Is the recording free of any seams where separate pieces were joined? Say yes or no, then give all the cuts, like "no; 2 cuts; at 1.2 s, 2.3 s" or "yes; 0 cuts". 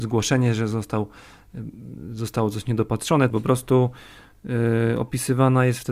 no; 1 cut; at 3.3 s